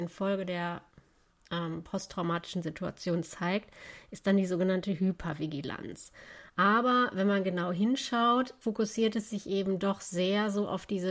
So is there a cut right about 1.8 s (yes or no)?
no